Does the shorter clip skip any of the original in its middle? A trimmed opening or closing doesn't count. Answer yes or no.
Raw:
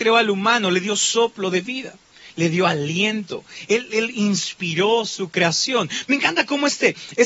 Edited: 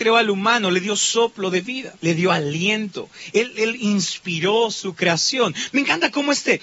yes